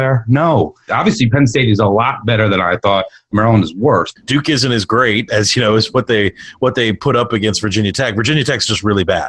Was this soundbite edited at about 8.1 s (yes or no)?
no